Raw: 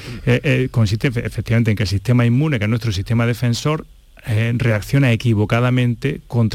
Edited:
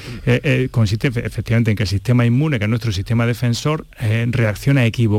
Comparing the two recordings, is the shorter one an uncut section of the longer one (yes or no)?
no